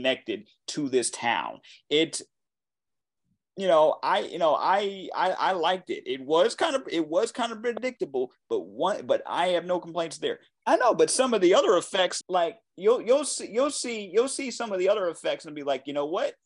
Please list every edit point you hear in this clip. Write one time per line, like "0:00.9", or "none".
0:10.5
0:12.2